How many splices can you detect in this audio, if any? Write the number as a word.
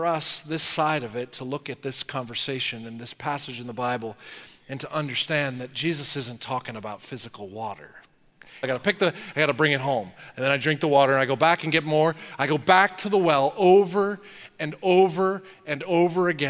one